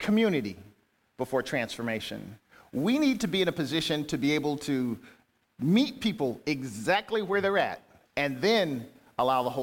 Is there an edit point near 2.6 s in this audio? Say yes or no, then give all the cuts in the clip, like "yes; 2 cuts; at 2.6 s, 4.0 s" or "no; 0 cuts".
no; 1 cut; at 8.0 s